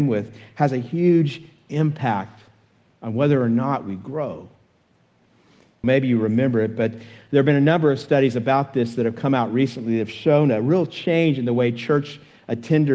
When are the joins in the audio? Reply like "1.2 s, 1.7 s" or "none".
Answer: 5.8 s